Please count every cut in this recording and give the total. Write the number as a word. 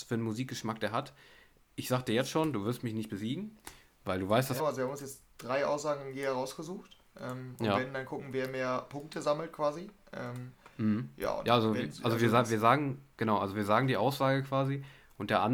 one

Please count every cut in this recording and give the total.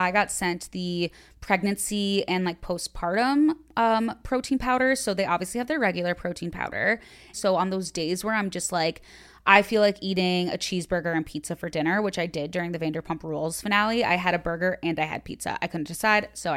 one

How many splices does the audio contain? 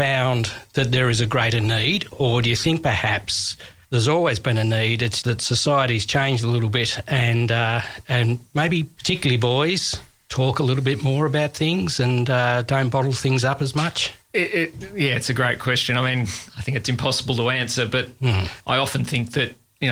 one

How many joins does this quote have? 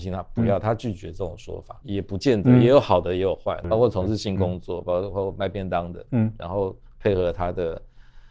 two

